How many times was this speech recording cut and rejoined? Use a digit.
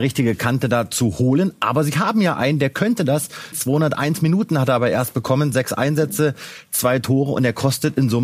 1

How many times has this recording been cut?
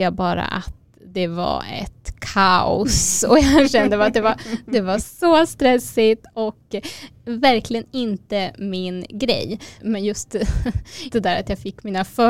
3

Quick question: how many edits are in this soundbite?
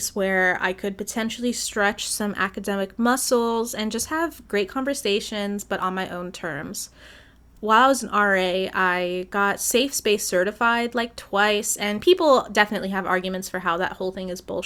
0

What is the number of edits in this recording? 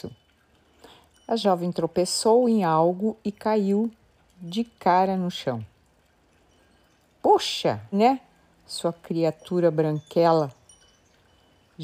1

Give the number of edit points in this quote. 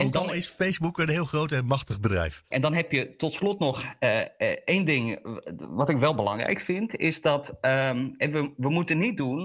1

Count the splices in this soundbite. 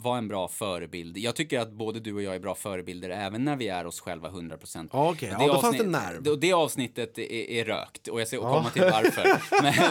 1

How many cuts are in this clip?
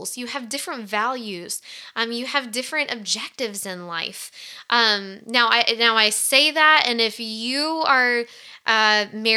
0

